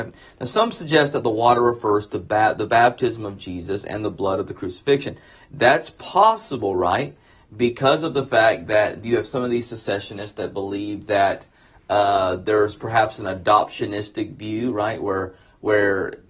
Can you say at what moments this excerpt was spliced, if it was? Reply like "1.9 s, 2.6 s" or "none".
none